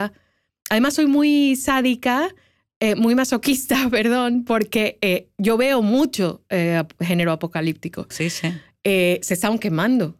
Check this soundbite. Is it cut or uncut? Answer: cut